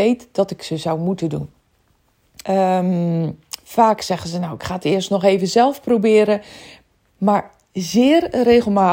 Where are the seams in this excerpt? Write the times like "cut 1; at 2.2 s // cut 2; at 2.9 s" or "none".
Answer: cut 1; at 2.4 s